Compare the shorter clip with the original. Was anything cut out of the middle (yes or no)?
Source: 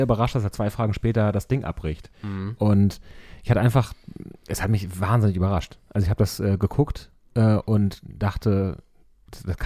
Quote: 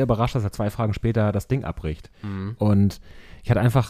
no